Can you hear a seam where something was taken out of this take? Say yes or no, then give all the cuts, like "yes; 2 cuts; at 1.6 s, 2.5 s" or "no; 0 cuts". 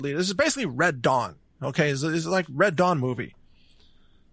no; 0 cuts